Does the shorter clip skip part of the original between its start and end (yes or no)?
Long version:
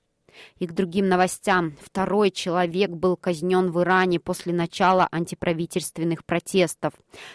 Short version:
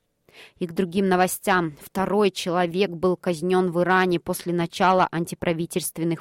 no